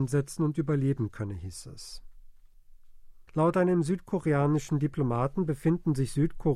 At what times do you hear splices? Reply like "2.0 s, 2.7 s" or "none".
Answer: 3.3 s

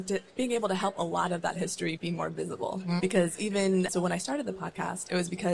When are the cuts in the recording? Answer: 3.0 s

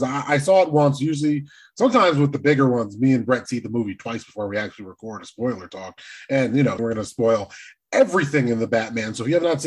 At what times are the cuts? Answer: 6.8 s

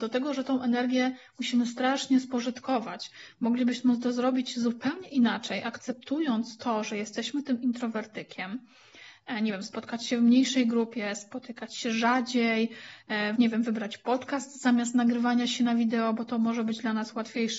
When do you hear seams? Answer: 13.4 s

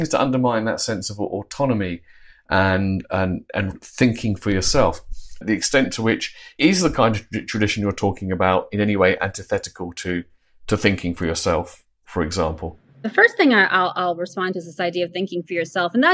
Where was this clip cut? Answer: 5.4 s, 12.9 s

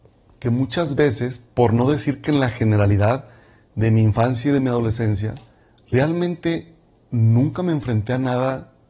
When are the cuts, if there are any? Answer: none

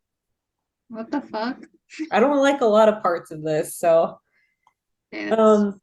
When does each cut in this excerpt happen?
2.1 s

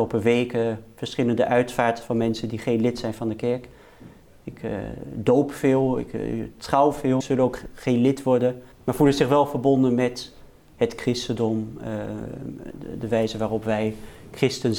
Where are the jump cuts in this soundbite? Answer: 7.2 s, 8.7 s

